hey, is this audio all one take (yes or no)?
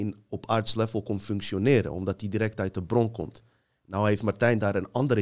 yes